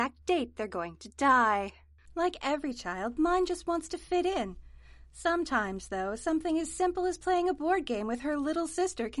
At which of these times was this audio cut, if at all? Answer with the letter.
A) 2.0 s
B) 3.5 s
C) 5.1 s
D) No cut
D